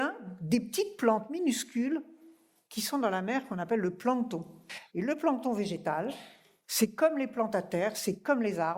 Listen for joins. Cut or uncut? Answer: cut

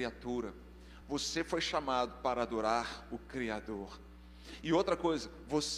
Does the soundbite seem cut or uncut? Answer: uncut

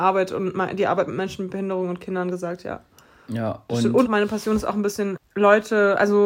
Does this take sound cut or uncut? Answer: cut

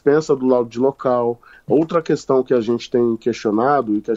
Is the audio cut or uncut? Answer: cut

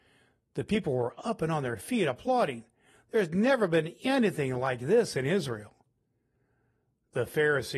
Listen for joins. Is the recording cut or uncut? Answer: uncut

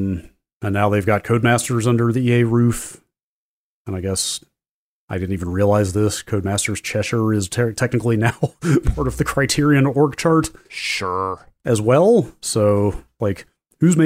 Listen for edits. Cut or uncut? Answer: uncut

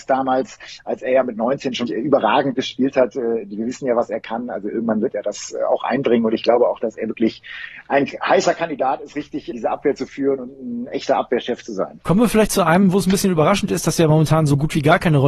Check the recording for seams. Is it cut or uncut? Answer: cut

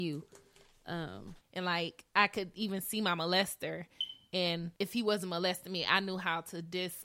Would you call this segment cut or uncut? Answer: cut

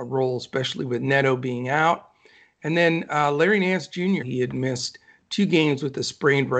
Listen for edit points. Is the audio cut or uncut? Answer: cut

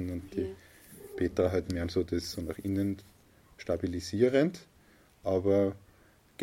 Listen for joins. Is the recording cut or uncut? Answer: uncut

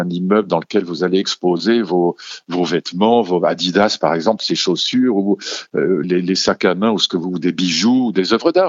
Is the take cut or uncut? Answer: cut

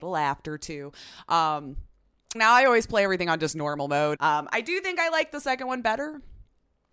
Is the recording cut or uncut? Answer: cut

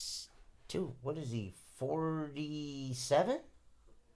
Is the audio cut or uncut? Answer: uncut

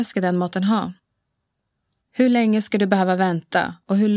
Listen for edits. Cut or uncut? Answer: uncut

